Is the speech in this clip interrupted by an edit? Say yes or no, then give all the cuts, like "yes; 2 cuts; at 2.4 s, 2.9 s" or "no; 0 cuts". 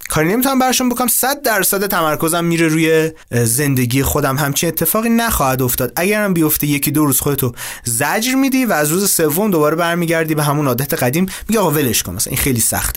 yes; 1 cut; at 3.2 s